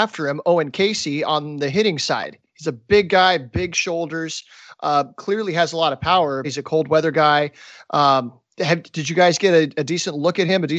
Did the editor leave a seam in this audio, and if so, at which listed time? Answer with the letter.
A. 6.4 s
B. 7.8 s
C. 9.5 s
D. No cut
A